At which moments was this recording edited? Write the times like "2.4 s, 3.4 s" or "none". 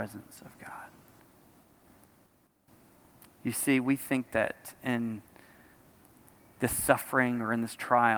none